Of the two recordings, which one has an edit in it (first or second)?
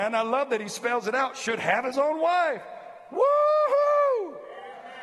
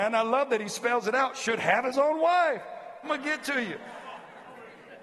second